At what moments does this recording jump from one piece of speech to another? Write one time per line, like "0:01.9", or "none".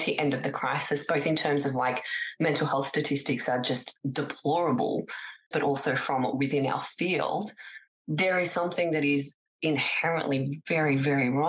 0:05.5